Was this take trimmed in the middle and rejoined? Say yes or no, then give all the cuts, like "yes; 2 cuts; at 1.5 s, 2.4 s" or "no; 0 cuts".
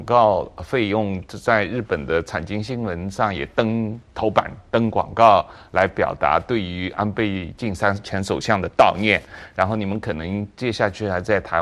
no; 0 cuts